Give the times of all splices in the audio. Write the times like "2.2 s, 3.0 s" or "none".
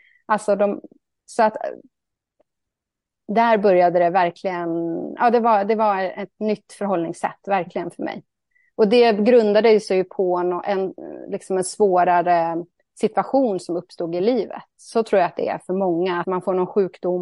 16.2 s